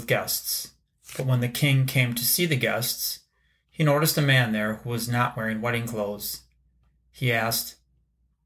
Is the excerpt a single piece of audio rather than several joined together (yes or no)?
yes